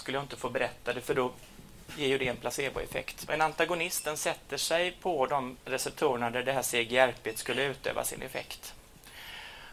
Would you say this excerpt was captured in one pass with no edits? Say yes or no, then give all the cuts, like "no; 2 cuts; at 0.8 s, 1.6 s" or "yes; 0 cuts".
no; 1 cut; at 3.3 s